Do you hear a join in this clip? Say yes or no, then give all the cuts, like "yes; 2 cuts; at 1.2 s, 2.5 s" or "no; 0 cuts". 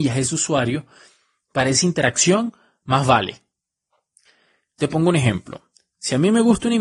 no; 0 cuts